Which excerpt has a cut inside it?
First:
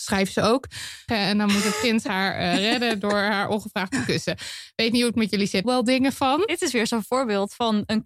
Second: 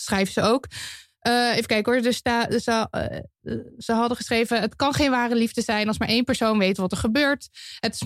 first; 2 cuts; at 1.1 s, 5.6 s

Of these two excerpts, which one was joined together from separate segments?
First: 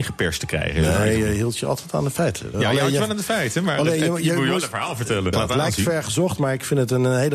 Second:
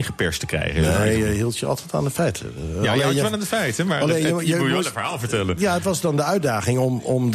first; 2 cuts; at 2.5 s, 5.3 s

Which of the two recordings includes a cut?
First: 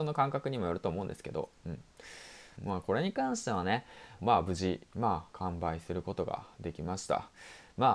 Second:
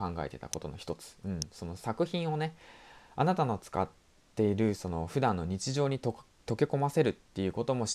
first; 2 cuts; at 2.6 s, 4.2 s

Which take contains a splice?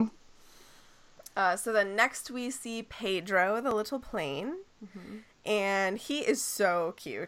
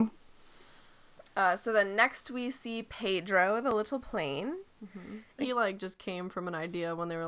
second; 1 cut; at 5.4 s

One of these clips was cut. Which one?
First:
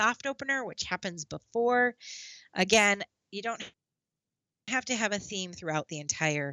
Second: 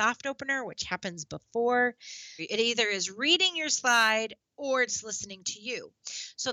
second; 1 cut; at 2.4 s

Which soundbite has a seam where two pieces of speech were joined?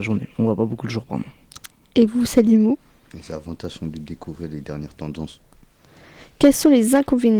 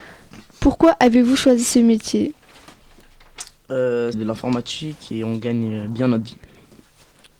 second; 1 cut; at 4.1 s

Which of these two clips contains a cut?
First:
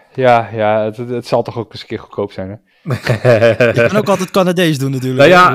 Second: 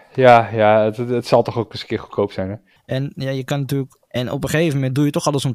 second; 2 cuts; at 2.8 s, 4.1 s

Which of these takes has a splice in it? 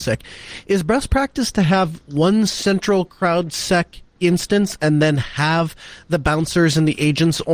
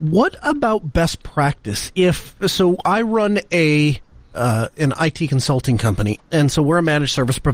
second; 1 cut; at 6.3 s

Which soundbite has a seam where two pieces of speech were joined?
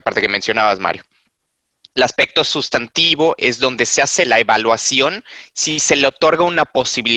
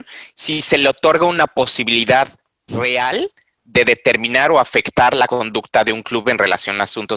second; 1 cut; at 2.7 s

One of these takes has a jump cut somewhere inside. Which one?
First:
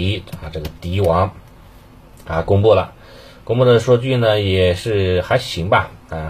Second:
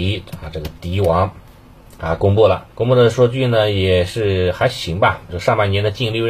second; 3 cuts; at 1.5 s, 2.7 s, 5.3 s

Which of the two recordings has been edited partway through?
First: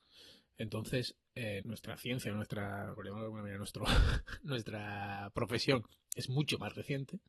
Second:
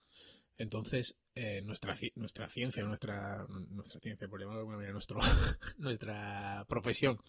first; 2 cuts; at 1.6 s, 3.0 s

